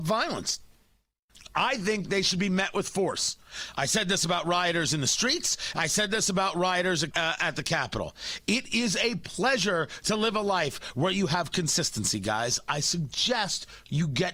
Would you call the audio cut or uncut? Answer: cut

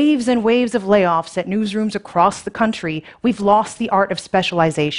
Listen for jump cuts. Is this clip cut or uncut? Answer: uncut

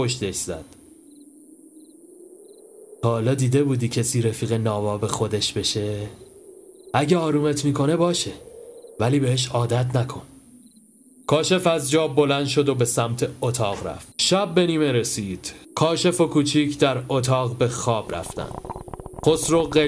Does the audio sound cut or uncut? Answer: cut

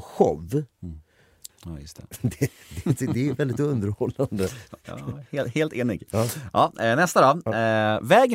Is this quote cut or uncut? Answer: cut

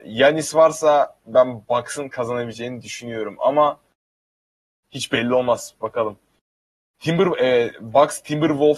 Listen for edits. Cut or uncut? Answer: uncut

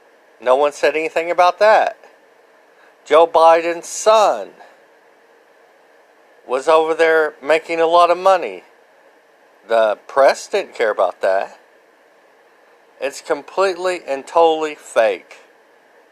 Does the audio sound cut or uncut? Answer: uncut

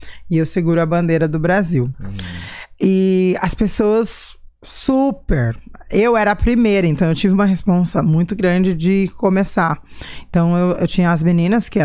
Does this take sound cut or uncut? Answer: cut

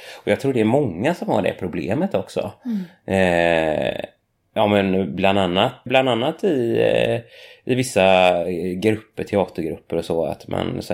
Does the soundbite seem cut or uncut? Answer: cut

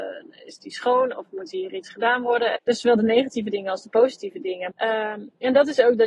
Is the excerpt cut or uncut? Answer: cut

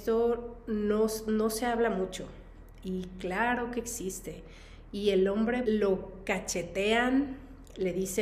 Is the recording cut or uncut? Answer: cut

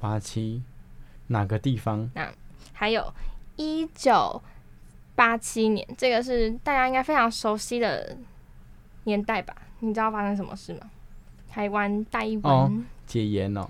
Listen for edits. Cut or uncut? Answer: cut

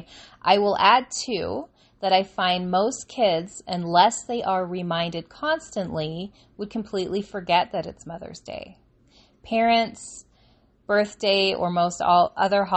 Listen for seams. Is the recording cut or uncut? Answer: uncut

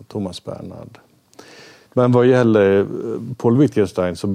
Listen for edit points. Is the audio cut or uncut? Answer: cut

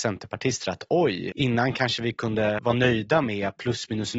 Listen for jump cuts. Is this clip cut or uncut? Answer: cut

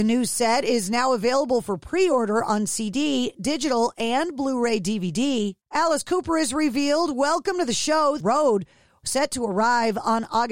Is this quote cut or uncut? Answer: cut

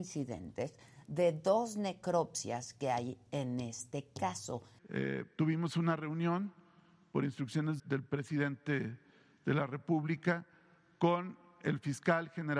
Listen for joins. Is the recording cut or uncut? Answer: cut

